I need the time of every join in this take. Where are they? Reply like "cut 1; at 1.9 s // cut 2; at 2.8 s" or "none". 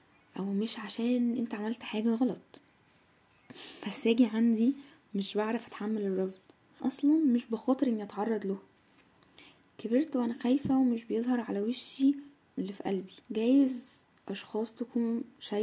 cut 1; at 6.8 s // cut 2; at 13.2 s

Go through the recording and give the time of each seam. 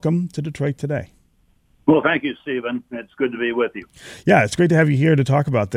none

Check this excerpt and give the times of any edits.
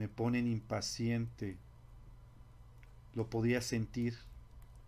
cut 1; at 3.1 s

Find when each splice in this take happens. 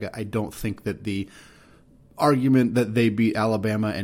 none

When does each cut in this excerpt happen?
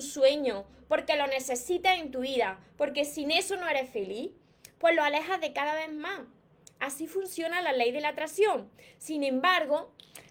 none

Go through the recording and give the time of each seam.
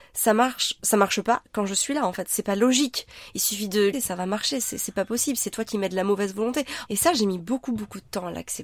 cut 1; at 3.9 s // cut 2; at 6.9 s

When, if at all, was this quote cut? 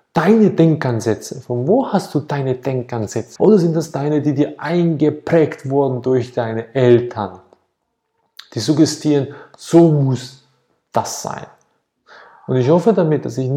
cut 1; at 3.4 s

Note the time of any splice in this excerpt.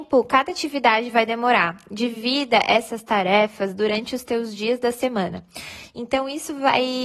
none

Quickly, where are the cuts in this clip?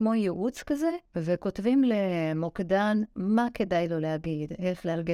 cut 1; at 1.1 s

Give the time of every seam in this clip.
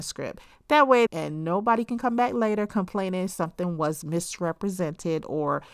cut 1; at 1.1 s

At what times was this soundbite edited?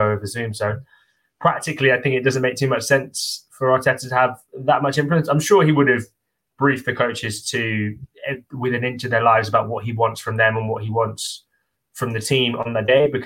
none

